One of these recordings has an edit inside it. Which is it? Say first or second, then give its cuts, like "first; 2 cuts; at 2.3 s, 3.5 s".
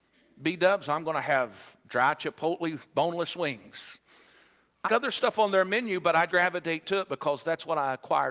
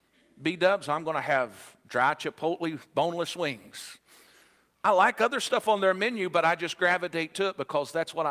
first; 2 cuts; at 4.8 s, 6.3 s